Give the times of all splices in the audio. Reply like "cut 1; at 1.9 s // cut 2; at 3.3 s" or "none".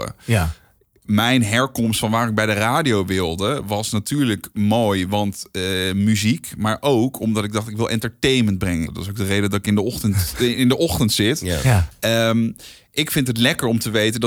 cut 1; at 8.9 s